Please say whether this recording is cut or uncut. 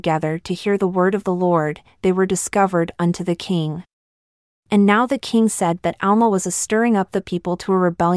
uncut